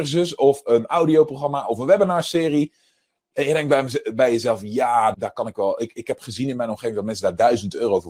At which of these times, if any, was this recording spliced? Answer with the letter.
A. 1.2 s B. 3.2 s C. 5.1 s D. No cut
C